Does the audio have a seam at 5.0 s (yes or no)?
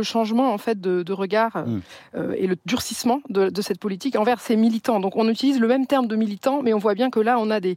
no